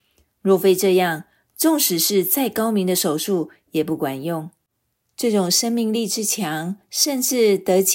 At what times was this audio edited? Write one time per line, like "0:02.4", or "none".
none